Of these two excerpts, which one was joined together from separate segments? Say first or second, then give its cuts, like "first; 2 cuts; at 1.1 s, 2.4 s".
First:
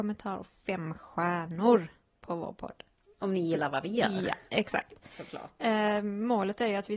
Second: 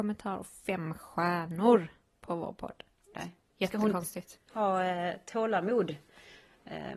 second; 2 cuts; at 3.1 s, 4.5 s